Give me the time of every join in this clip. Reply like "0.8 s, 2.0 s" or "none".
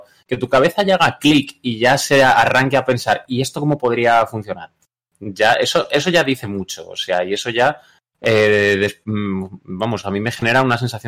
none